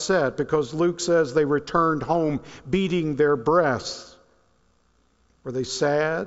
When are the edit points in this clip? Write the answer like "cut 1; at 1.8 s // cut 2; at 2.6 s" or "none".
none